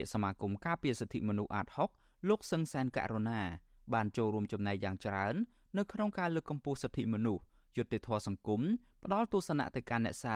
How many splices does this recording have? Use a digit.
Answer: 0